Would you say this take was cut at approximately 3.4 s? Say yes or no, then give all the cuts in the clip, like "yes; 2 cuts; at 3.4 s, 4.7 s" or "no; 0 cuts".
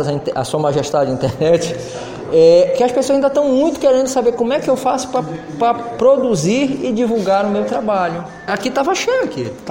no; 1 cut; at 8.5 s